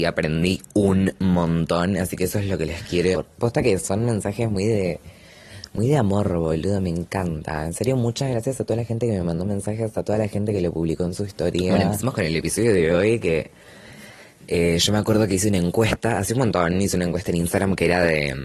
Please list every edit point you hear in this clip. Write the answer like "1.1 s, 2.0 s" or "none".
3.1 s